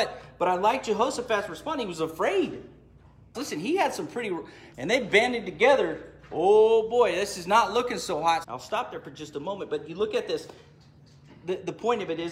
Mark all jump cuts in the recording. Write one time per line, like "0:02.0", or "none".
0:03.3
0:04.7
0:08.4